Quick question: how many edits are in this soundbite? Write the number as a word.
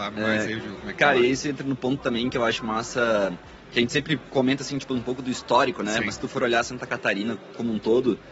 zero